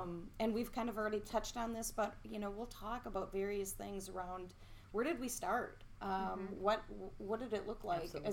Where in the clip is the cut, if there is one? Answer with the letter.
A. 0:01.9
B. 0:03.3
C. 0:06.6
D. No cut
D